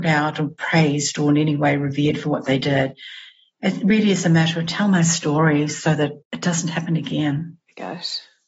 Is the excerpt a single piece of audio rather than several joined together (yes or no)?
no